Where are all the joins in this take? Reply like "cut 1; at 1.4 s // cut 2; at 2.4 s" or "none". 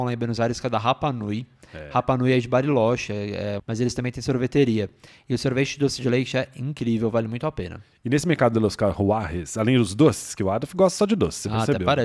cut 1; at 3.6 s

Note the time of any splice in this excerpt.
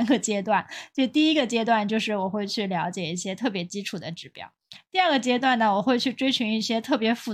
none

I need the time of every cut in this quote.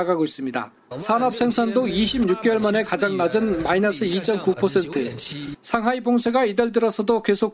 cut 1; at 0.9 s // cut 2; at 5.5 s

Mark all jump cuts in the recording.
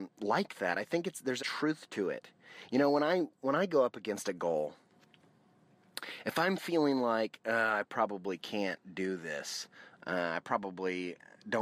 cut 1; at 1.4 s

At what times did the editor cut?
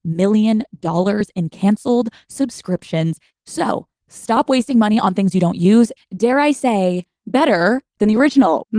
cut 1; at 6.0 s

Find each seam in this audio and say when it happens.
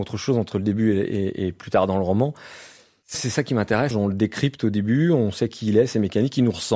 cut 1; at 3.9 s

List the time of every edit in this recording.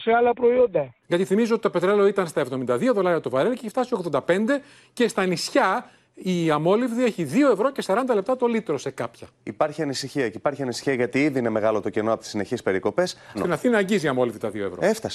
cut 1; at 1.0 s // cut 2; at 13.3 s

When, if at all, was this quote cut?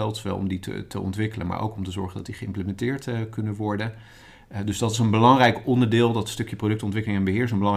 none

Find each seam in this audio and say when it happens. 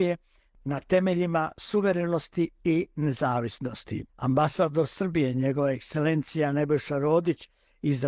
cut 1; at 4.1 s

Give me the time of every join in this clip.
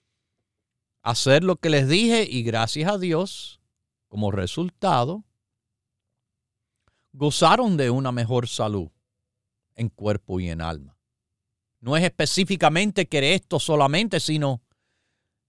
cut 1; at 11.7 s

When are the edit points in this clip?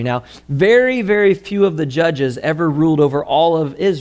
none

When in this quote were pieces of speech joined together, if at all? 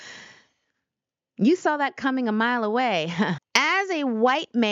cut 1; at 3.4 s

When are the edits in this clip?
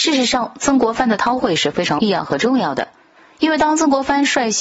none

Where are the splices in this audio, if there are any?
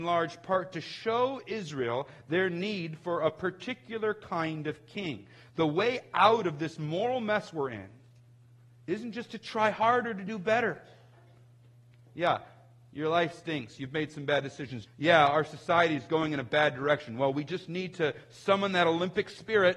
cut 1; at 14.9 s

